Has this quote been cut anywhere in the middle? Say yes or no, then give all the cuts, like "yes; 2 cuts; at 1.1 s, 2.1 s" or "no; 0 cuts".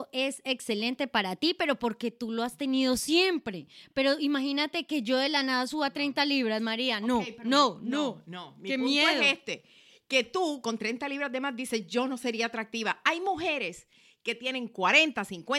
no; 0 cuts